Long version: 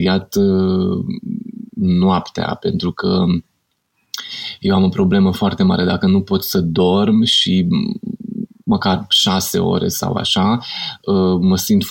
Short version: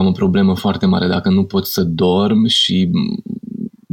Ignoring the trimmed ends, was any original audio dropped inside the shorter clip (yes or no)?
no